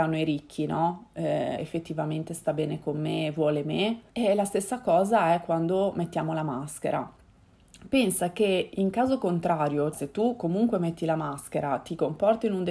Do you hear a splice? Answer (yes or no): yes